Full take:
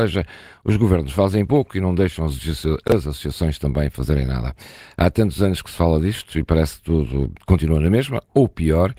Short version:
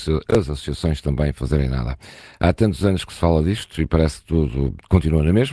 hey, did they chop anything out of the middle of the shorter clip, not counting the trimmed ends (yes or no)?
no